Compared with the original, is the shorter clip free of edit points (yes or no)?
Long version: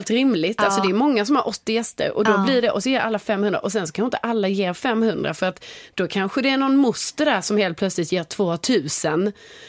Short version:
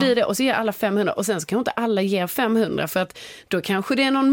yes